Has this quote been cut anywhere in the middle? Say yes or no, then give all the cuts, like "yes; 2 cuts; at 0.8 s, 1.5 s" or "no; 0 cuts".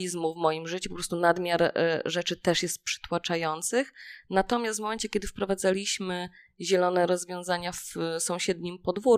no; 0 cuts